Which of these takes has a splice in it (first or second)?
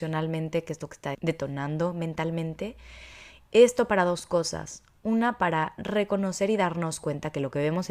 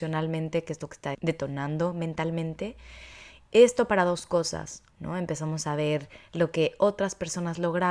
second